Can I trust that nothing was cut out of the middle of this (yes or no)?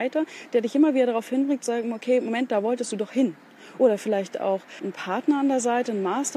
yes